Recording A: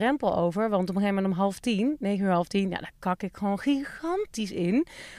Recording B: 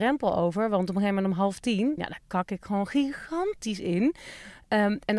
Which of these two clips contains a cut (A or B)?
B